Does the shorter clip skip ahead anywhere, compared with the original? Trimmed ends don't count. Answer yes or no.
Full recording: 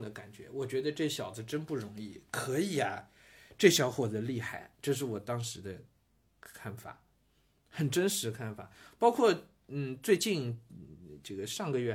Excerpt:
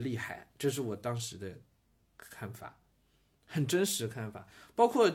no